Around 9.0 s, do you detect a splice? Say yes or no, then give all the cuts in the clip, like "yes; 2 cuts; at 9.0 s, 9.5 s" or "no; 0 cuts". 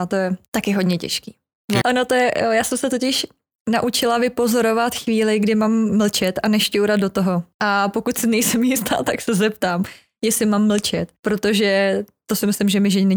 no; 1 cut; at 1.8 s